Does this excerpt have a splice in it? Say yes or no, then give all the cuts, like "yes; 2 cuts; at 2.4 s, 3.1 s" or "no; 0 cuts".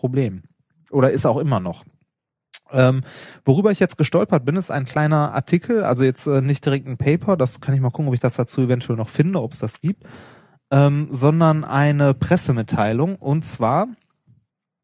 no; 0 cuts